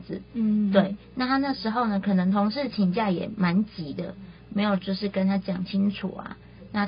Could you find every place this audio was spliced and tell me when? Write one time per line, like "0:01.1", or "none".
none